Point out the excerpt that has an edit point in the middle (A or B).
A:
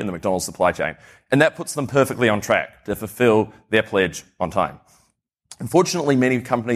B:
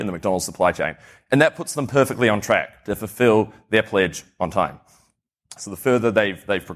B